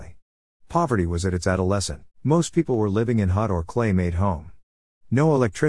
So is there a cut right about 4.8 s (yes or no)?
no